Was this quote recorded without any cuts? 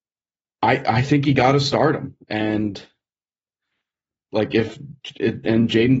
yes; 0 cuts

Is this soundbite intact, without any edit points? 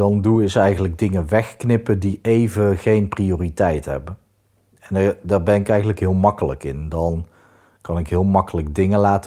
yes; 0 cuts

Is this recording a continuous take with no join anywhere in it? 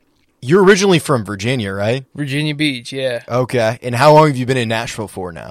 yes; 0 cuts

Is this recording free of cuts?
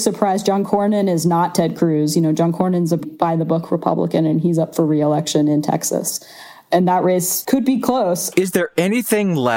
no; 2 cuts; at 3.0 s, 8.3 s

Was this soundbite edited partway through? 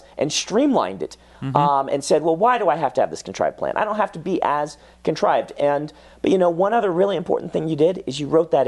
no; 0 cuts

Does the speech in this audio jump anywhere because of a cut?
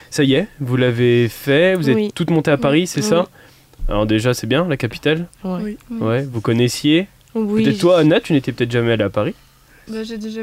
no; 0 cuts

